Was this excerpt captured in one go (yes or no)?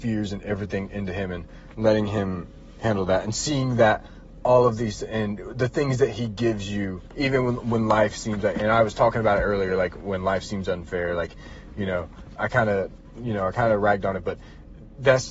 yes